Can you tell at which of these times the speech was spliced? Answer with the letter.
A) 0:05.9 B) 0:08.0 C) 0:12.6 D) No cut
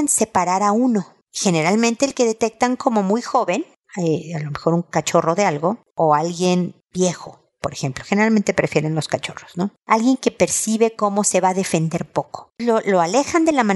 C